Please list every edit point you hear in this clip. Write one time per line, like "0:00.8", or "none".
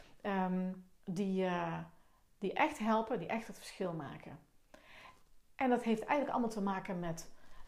none